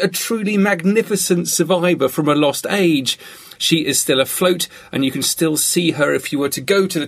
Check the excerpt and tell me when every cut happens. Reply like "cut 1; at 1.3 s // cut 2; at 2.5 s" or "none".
cut 1; at 3.6 s